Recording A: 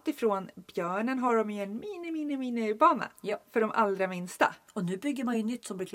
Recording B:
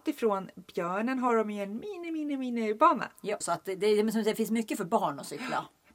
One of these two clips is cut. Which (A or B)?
B